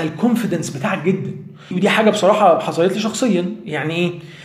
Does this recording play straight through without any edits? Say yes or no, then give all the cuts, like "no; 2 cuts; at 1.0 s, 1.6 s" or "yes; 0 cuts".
no; 1 cut; at 1.7 s